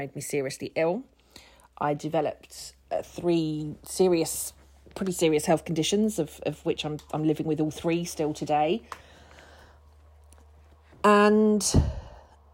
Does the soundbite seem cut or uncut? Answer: uncut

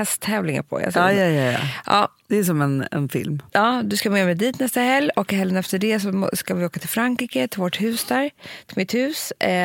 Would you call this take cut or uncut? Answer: uncut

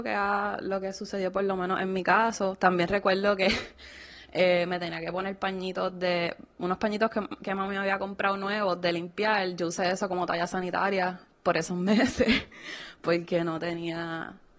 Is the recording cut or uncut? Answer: uncut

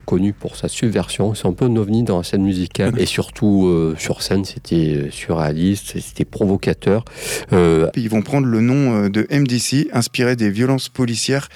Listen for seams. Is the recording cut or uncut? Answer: cut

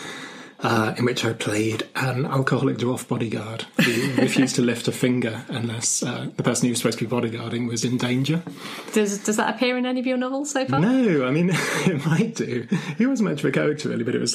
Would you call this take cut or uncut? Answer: uncut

